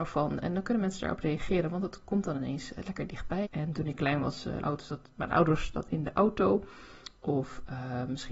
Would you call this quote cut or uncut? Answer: cut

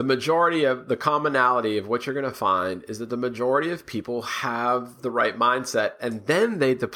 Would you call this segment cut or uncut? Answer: uncut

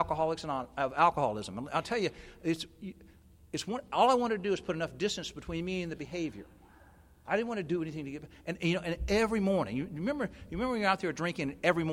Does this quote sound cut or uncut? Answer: uncut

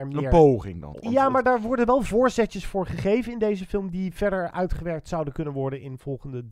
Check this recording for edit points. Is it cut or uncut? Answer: cut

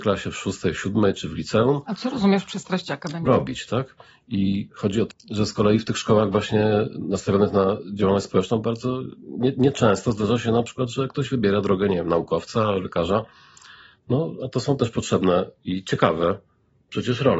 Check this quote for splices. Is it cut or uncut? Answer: cut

